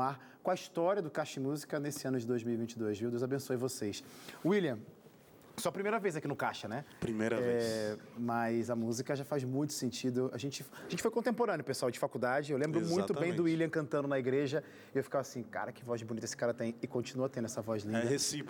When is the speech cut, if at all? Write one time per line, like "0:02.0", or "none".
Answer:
none